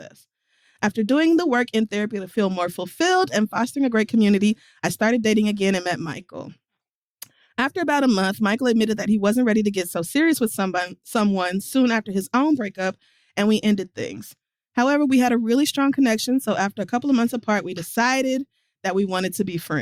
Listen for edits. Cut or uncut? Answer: uncut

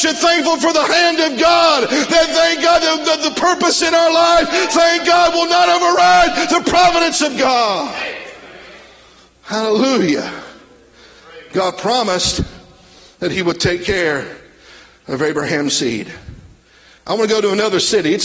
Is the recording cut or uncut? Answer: cut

